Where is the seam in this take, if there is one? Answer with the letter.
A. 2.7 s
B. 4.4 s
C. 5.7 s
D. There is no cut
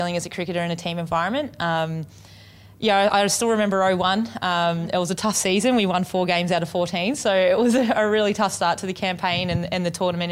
D